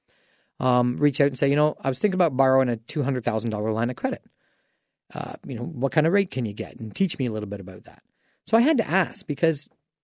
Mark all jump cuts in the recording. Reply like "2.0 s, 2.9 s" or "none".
none